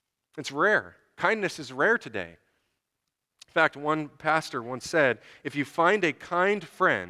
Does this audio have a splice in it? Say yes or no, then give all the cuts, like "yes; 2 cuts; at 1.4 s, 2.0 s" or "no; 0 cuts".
no; 0 cuts